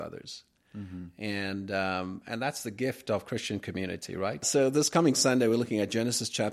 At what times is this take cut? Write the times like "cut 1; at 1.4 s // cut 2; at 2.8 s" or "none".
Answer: cut 1; at 4.4 s